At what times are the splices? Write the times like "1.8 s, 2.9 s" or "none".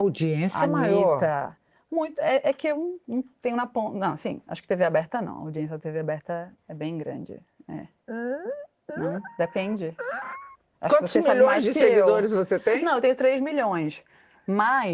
none